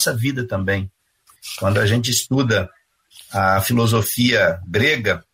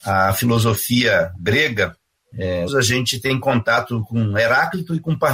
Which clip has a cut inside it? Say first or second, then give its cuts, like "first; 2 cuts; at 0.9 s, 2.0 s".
second; 1 cut; at 2.7 s